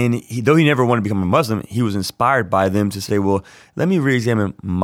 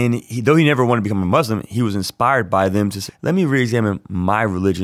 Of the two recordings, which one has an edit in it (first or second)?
second